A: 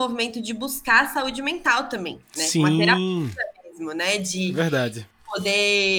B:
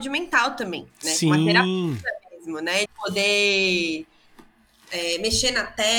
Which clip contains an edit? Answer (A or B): B